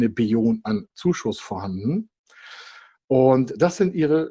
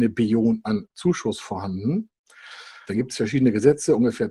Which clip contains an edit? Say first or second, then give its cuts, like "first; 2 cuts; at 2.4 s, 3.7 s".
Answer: second; 1 cut; at 2.8 s